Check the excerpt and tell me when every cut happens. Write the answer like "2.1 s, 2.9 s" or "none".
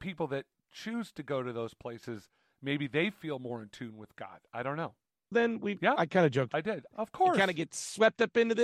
5.3 s, 6.9 s